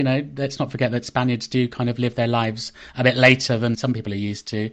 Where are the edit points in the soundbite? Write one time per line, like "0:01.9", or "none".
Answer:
0:03.7